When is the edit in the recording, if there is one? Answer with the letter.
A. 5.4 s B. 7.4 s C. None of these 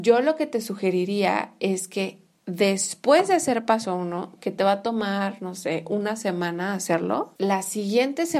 B